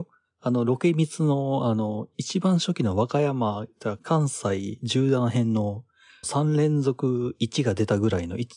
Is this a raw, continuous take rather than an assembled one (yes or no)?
no